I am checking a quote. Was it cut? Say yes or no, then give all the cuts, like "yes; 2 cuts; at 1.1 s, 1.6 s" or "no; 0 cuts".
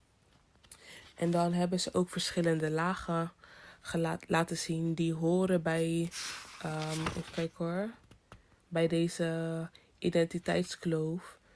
no; 0 cuts